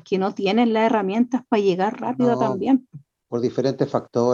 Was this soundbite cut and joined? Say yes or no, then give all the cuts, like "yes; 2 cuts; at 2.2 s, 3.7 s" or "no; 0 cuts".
no; 0 cuts